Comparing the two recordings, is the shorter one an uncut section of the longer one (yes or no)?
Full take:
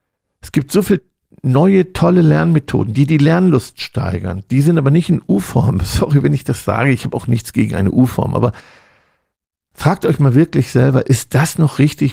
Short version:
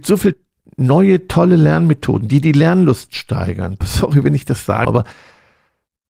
no